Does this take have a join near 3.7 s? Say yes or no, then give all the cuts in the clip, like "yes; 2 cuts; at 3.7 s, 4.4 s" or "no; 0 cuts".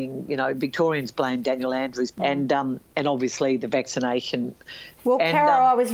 no; 2 cuts; at 2.1 s, 5.0 s